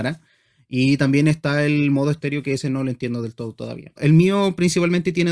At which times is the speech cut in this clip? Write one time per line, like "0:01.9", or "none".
0:04.0